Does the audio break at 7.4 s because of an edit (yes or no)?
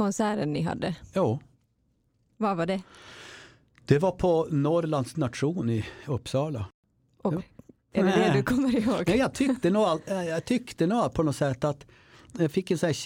yes